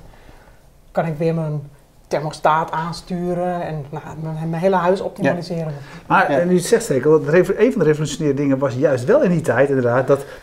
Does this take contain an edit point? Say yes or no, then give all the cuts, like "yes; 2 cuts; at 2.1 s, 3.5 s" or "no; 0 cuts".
no; 0 cuts